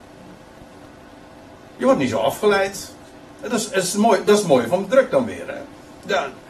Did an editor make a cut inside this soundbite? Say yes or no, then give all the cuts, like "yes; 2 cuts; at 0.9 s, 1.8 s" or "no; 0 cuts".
no; 0 cuts